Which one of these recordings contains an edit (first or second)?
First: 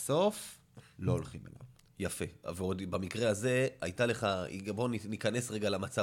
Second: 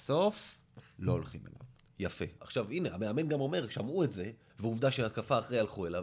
second